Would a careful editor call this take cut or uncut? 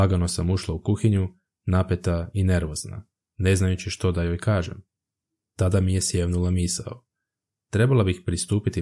uncut